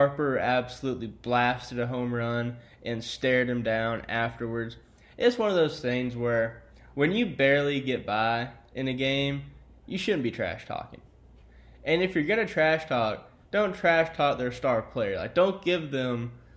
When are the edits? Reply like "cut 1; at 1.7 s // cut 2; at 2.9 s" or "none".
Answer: none